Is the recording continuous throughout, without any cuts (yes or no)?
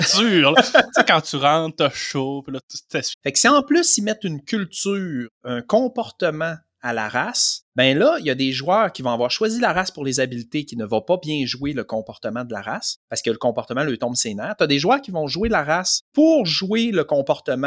no